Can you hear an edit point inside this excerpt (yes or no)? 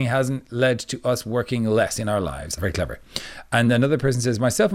yes